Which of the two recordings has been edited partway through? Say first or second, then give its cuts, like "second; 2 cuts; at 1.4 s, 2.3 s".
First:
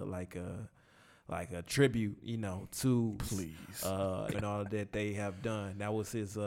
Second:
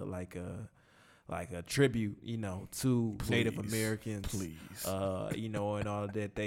first; 2 cuts; at 3.3 s, 4.3 s